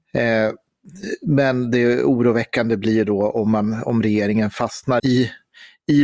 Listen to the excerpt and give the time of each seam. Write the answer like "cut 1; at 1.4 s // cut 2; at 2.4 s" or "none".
cut 1; at 5.0 s